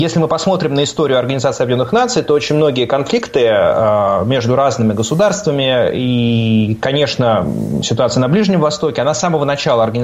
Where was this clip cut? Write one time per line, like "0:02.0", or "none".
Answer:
none